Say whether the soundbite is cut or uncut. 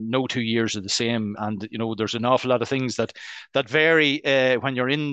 cut